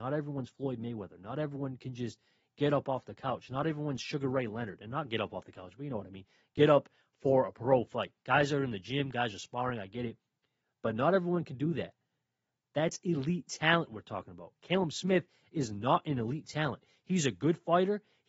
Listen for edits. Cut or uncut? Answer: uncut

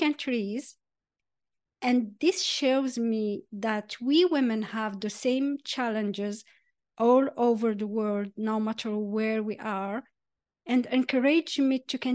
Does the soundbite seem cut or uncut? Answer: uncut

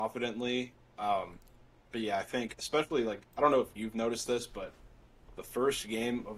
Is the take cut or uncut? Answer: uncut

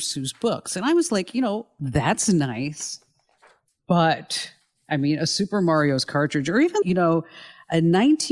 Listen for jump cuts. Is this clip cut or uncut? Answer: cut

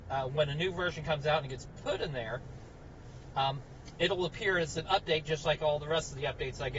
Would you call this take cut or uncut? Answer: uncut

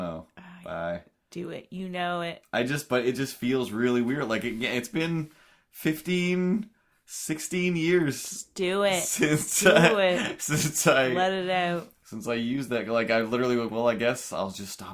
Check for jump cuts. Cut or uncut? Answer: cut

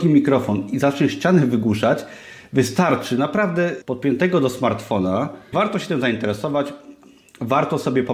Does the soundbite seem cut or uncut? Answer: cut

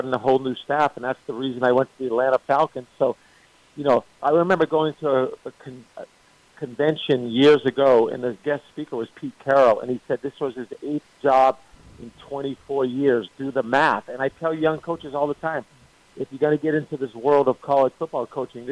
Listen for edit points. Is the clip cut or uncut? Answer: cut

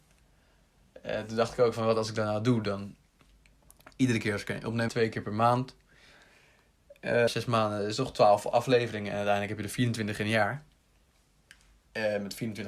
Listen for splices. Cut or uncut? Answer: cut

